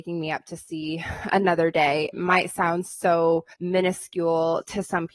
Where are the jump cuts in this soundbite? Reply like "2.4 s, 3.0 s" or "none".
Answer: 2.1 s, 3.5 s